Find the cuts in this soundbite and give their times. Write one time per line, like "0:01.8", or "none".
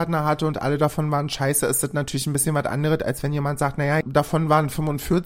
0:04.0